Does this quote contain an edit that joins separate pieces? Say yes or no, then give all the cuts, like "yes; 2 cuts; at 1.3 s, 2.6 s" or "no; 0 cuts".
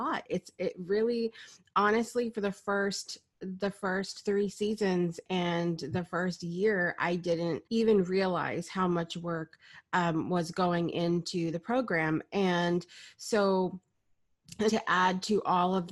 yes; 2 cuts; at 7.7 s, 14.7 s